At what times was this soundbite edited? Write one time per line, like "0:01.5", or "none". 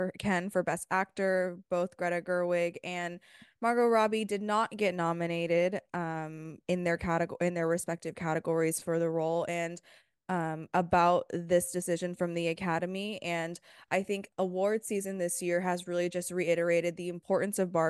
0:10.1